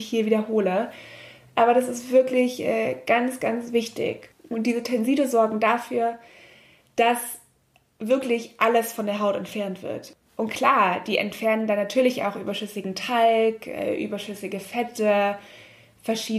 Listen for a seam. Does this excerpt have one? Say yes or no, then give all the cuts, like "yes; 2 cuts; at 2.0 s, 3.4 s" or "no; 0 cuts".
yes; 1 cut; at 4.3 s